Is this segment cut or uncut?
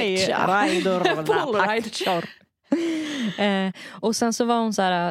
uncut